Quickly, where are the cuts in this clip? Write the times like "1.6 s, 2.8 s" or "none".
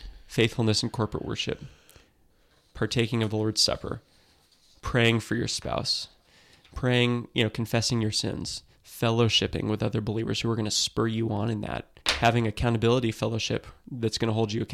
12.0 s